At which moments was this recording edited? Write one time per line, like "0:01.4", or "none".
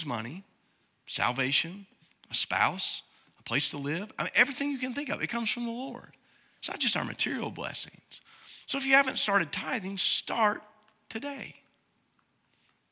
none